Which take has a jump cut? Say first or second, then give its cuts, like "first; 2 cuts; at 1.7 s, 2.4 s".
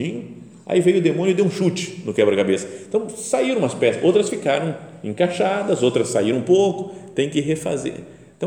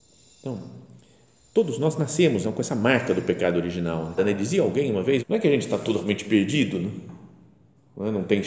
second; 3 cuts; at 2.4 s, 4.2 s, 5.2 s